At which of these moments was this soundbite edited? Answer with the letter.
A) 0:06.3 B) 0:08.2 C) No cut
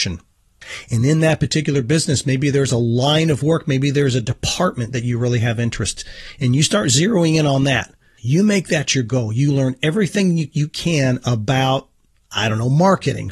B